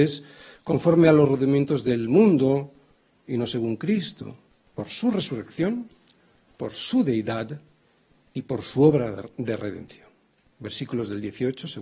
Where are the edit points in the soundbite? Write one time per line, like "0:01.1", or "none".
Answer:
0:04.7